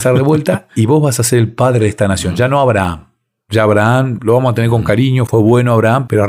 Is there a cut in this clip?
no; 0 cuts

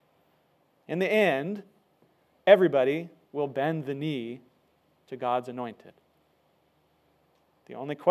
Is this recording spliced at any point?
no; 0 cuts

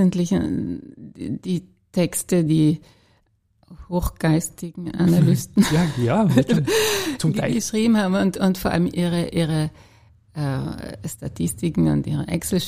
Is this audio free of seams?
no; 1 cut; at 2.5 s

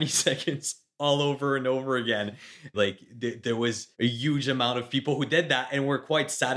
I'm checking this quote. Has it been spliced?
yes; 2 cuts; at 2.7 s, 3.9 s

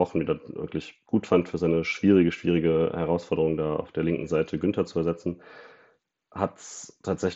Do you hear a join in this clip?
no; 0 cuts

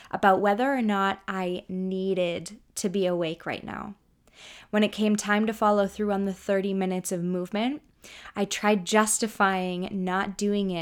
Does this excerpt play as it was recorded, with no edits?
yes; 0 cuts

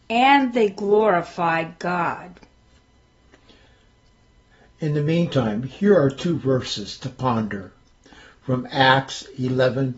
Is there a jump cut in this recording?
no; 0 cuts

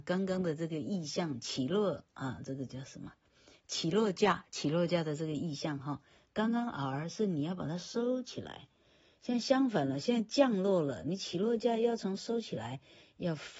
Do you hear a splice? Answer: no; 0 cuts

